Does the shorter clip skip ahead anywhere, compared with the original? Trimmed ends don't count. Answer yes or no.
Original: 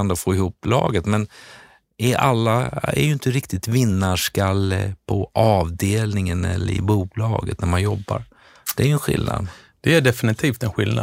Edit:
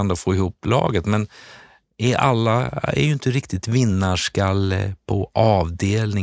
no